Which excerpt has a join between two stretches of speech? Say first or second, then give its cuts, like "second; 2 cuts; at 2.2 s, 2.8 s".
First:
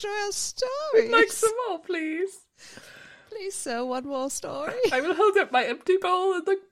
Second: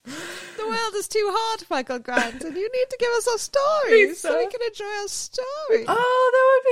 second; 1 cut; at 5.8 s